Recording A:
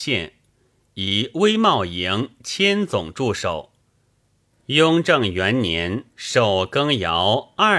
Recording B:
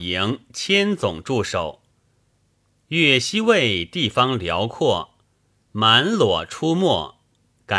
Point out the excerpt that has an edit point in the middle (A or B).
A